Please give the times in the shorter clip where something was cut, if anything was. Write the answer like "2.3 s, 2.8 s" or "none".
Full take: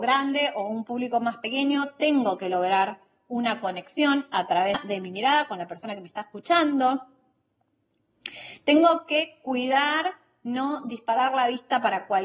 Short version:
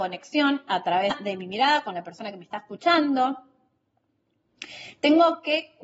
none